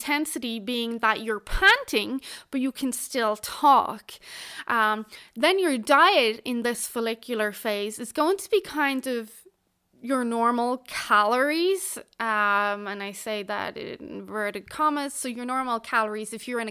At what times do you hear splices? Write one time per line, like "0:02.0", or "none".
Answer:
none